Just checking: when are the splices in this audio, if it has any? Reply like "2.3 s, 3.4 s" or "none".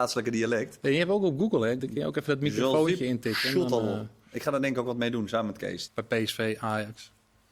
1.8 s, 5.9 s

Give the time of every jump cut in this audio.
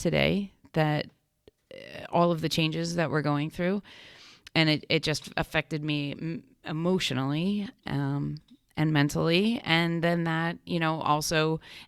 none

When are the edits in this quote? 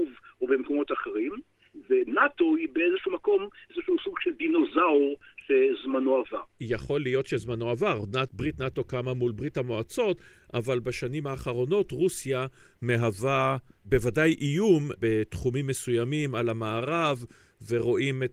none

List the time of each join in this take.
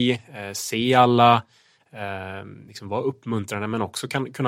none

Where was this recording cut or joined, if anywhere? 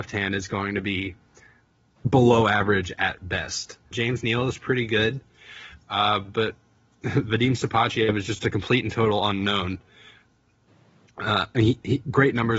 3.9 s

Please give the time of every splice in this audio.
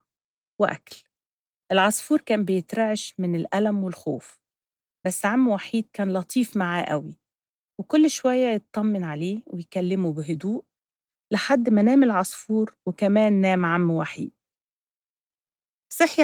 none

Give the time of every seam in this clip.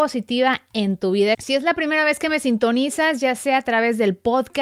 1.3 s

